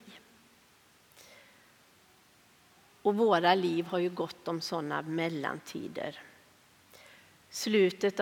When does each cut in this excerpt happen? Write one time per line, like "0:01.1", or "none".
none